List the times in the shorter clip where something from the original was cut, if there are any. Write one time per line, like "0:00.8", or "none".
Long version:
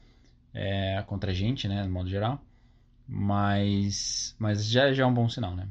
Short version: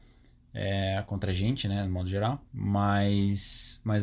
0:02.5